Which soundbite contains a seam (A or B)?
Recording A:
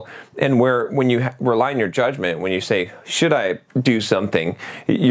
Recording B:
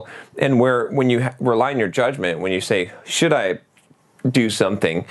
A